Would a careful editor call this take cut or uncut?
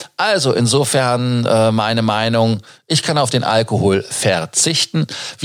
uncut